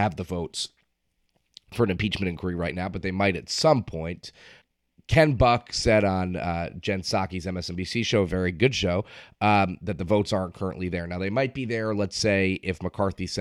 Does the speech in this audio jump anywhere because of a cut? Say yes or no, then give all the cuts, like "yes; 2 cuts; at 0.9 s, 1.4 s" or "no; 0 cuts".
no; 0 cuts